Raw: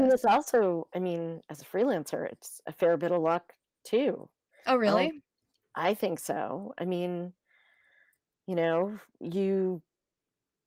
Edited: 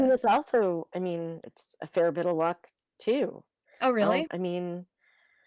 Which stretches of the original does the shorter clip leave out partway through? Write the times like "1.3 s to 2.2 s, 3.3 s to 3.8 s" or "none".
1.4 s to 2.3 s, 5.1 s to 6.7 s